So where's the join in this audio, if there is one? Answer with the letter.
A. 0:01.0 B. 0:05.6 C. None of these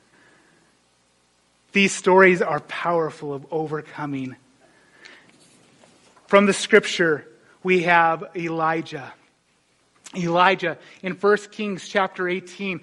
C